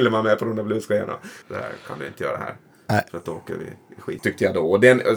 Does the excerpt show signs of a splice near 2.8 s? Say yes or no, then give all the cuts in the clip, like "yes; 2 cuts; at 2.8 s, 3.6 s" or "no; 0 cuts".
no; 2 cuts; at 1.4 s, 4.2 s